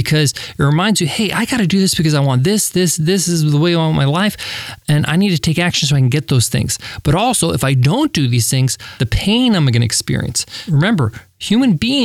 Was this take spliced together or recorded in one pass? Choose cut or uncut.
cut